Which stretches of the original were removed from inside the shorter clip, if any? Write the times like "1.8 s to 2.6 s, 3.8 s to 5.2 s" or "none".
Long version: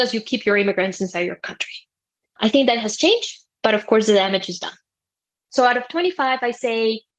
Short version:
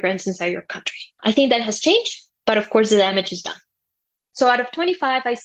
1.9 s to 2.3 s